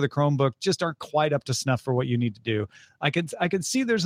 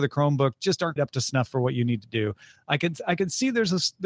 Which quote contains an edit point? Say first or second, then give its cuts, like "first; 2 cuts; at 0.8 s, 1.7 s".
second; 1 cut; at 1.0 s